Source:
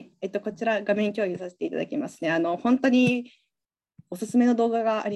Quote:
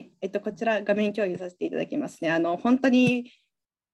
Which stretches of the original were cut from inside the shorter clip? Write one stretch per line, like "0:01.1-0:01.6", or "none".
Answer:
none